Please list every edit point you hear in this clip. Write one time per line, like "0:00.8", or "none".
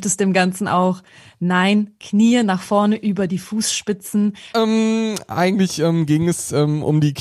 0:04.5

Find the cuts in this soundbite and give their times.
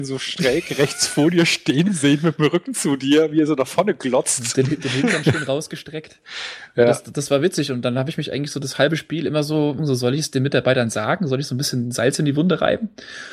0:09.8

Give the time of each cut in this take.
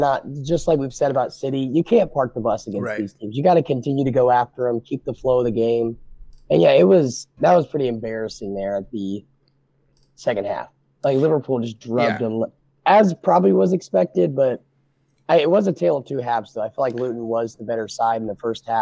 none

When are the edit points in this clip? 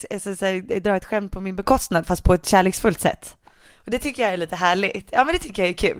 none

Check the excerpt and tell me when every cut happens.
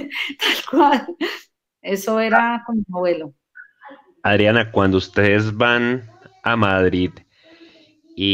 0:01.6

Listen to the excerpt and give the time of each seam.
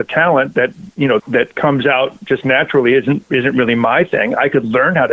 0:01.2

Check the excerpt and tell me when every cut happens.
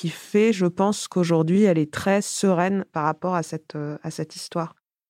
none

